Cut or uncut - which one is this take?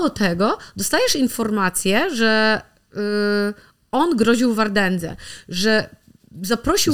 uncut